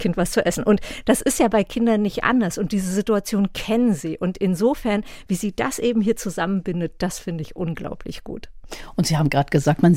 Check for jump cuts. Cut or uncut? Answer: uncut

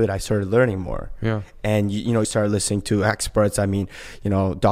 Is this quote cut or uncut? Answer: cut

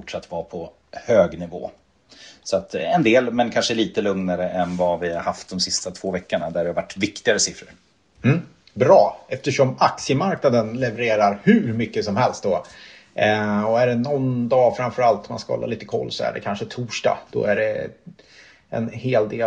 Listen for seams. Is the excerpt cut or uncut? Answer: uncut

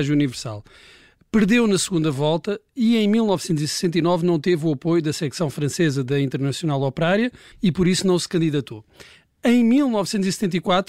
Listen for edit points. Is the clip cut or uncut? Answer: cut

